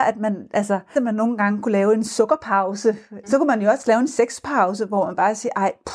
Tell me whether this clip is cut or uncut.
cut